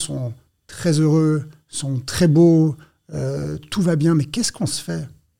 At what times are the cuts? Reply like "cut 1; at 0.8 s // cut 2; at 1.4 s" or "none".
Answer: none